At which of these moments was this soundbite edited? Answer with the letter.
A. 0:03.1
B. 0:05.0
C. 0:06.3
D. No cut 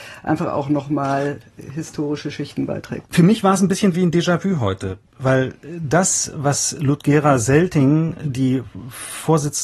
A